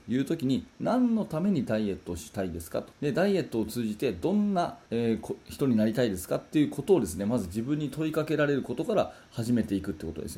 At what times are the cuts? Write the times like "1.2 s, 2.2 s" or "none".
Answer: 2.9 s, 4.9 s